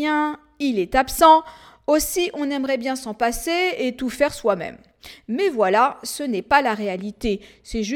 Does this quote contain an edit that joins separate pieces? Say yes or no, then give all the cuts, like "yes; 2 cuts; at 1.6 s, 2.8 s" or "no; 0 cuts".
no; 0 cuts